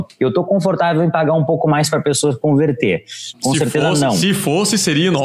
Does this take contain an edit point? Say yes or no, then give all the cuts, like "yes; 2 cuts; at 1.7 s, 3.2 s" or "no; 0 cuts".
yes; 1 cut; at 3.3 s